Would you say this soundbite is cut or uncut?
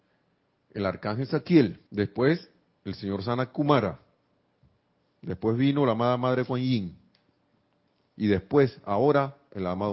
cut